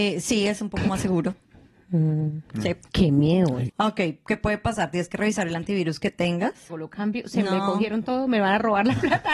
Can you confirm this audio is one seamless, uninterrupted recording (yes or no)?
no